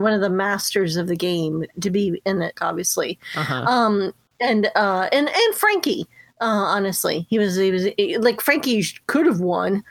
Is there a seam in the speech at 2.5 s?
yes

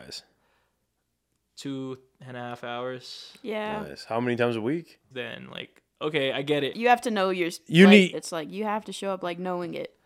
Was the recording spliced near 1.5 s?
no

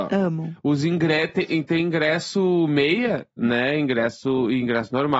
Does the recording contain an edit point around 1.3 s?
no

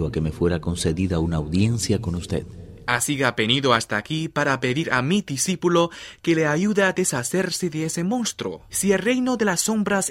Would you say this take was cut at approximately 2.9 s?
no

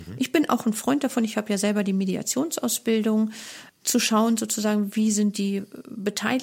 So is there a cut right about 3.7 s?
yes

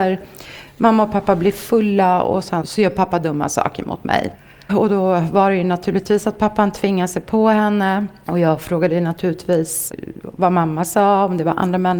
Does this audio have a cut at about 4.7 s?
yes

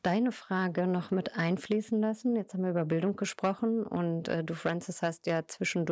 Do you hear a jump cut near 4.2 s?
no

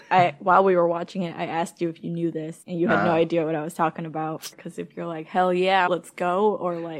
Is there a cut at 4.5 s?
yes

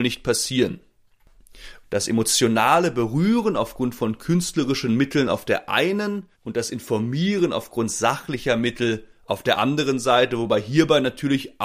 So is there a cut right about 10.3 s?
no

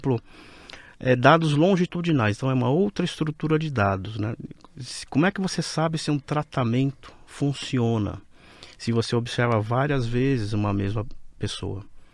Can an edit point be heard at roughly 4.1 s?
no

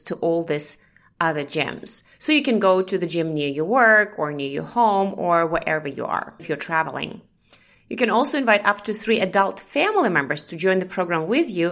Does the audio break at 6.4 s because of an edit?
yes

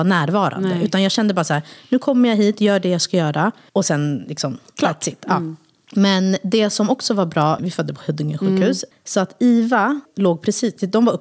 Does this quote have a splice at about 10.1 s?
yes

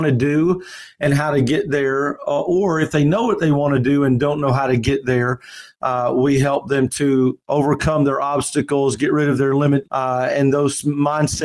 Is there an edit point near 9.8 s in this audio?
yes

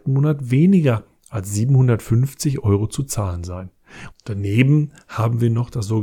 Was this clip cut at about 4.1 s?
yes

